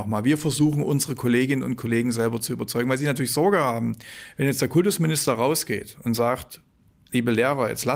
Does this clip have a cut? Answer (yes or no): no